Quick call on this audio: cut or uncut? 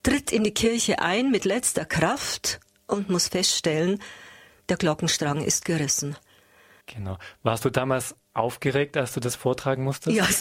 cut